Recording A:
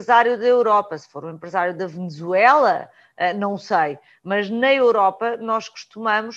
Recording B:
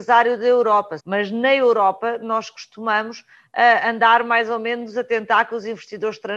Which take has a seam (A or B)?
B